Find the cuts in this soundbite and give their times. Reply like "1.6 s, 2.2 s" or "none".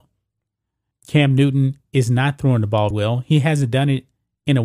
0.9 s, 2.9 s